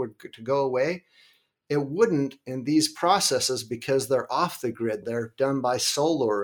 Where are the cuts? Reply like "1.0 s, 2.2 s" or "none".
5.0 s

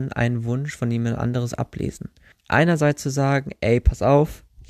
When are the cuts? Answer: 2.3 s

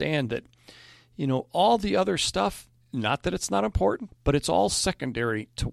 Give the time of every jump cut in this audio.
4.1 s

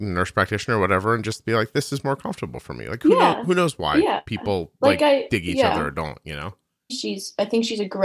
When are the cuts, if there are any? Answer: 6.9 s

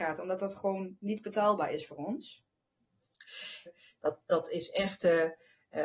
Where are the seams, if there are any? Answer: 3.7 s

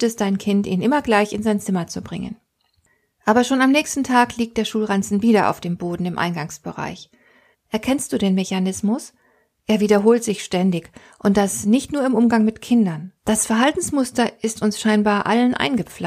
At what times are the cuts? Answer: 7.5 s, 13.2 s

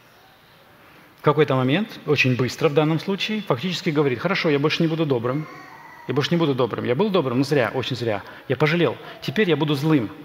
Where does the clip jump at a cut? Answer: none

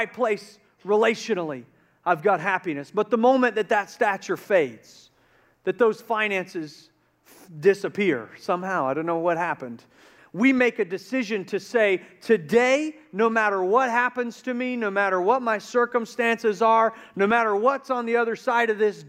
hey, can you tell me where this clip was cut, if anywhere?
10.2 s

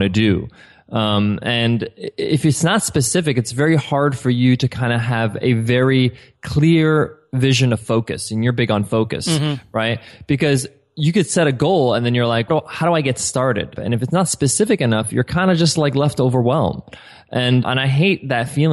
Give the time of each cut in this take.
12.5 s, 13.8 s, 17.6 s

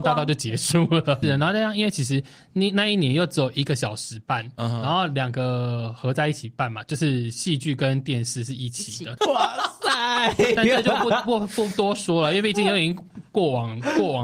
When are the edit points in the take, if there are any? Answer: 1.2 s, 9.2 s

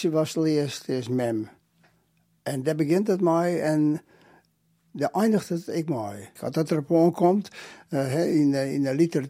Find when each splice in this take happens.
6.4 s

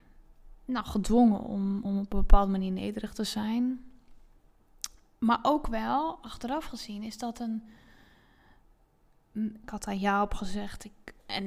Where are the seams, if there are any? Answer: 1.9 s, 9.6 s

